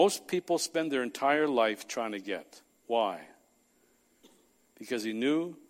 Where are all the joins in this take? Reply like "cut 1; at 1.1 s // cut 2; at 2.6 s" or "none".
none